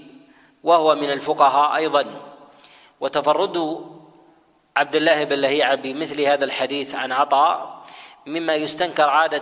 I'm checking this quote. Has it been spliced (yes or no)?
no